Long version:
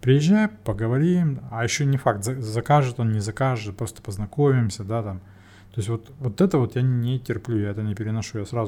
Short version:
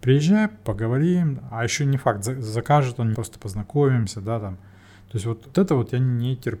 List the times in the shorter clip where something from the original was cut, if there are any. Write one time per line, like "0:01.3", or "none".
0:03.1
0:05.5